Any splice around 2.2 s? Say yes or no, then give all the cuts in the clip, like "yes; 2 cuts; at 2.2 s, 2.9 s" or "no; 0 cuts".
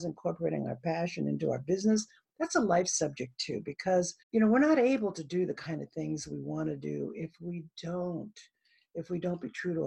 no; 1 cut; at 4.2 s